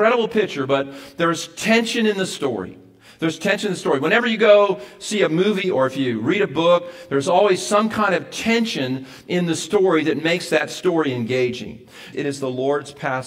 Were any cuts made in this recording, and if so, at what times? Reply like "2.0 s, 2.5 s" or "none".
5.6 s, 12.1 s